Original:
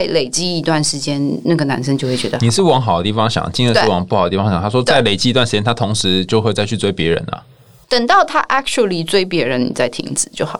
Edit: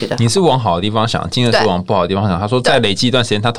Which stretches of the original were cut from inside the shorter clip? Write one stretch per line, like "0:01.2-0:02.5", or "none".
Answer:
none